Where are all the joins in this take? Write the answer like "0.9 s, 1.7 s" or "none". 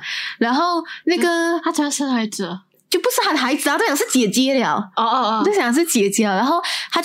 none

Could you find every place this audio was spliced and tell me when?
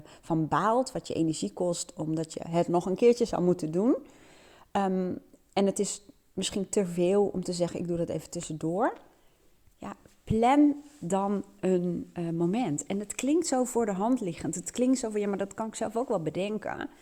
none

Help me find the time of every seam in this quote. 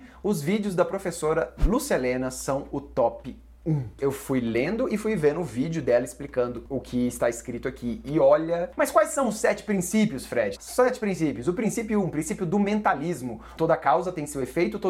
10.6 s, 13.6 s

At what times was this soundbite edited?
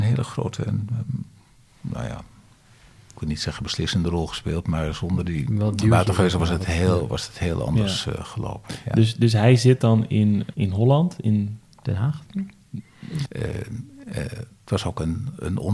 10.5 s, 13.2 s

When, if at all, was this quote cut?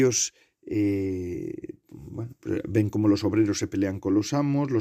none

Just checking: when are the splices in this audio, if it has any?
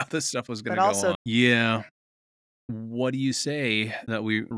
1.1 s

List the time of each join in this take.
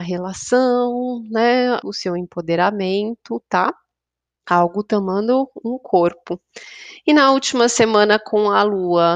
1.8 s

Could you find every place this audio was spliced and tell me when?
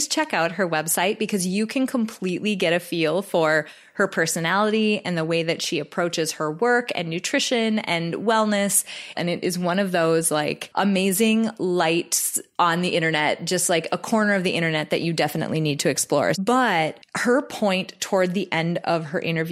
9.1 s, 16.3 s

